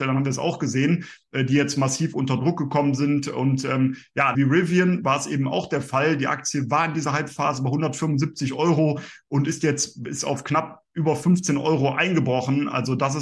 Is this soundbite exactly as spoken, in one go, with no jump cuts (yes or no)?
no